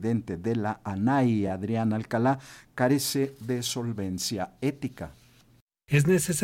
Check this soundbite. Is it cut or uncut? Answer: uncut